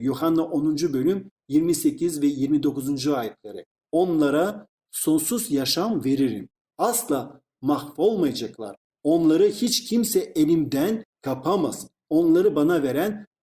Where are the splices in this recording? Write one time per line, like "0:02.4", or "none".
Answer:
none

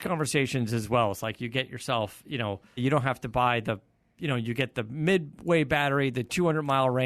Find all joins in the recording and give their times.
0:02.8

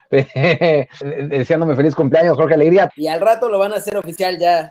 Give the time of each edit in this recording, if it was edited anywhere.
0:01.0
0:02.9

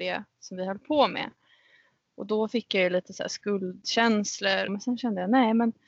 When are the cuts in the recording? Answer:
0:04.7

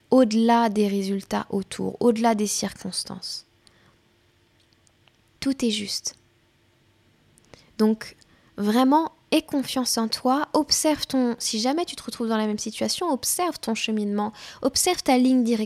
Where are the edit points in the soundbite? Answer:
none

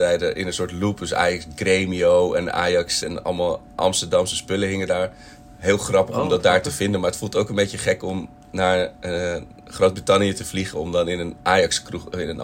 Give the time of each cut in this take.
0:03.0

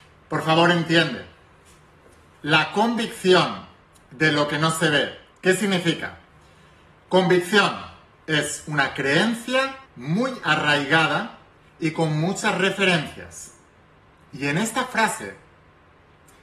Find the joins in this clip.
0:05.3
0:09.9
0:14.3

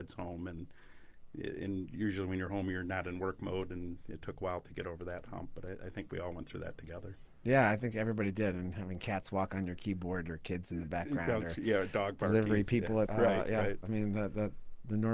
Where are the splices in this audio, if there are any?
0:13.1

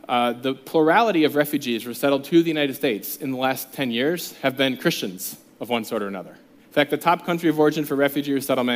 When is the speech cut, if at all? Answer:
0:06.6

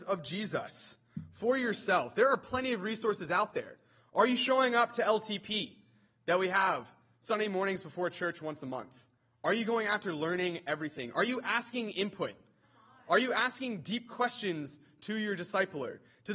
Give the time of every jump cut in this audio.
none

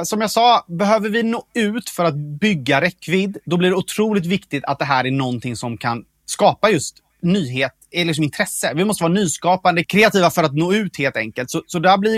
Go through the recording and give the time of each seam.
none

